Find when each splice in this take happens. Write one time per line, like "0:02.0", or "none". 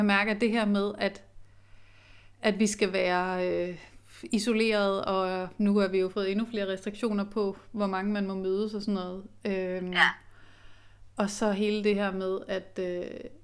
none